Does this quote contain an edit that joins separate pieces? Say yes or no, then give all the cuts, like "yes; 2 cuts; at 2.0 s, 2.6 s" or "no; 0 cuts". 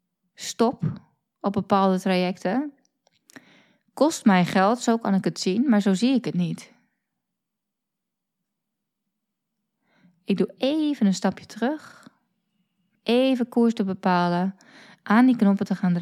no; 0 cuts